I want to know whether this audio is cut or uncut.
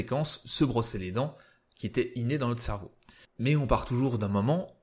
cut